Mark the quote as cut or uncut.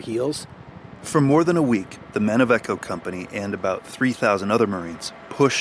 uncut